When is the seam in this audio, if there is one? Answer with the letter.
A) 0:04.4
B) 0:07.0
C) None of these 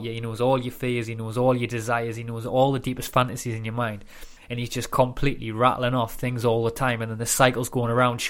A